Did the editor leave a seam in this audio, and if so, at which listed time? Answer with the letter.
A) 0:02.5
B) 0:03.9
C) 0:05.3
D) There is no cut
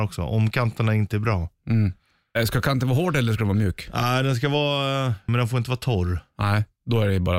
C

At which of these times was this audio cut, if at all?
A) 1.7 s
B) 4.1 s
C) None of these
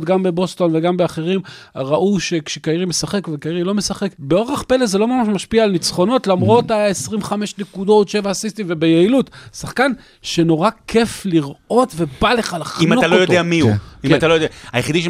B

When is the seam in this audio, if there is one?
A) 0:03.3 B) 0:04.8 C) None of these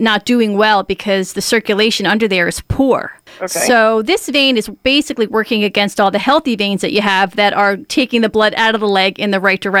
A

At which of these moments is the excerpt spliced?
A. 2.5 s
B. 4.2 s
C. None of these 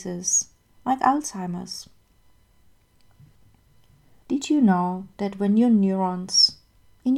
C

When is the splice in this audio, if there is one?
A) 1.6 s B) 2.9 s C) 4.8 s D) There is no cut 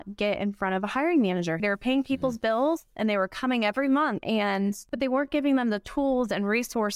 A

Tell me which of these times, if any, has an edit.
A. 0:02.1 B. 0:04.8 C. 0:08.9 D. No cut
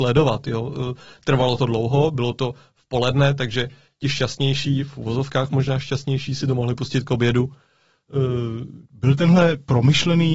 C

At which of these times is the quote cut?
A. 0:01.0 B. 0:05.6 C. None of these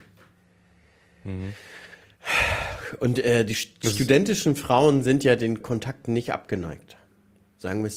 B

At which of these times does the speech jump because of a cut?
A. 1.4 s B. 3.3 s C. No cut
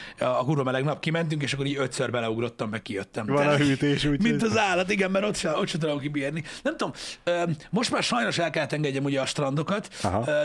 B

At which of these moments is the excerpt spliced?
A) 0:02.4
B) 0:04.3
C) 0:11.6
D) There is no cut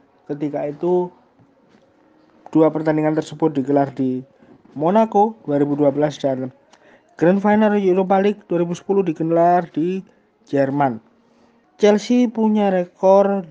C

